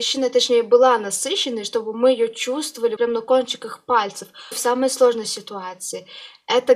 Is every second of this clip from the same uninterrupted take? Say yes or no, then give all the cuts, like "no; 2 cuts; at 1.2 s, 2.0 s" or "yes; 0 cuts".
no; 2 cuts; at 3.0 s, 4.5 s